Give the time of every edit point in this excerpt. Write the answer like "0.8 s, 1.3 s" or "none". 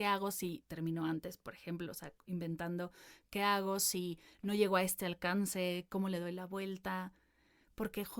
none